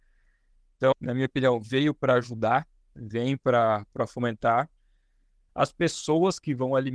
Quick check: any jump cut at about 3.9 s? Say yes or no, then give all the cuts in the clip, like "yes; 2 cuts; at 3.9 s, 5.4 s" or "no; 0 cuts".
no; 2 cuts; at 0.9 s, 5.5 s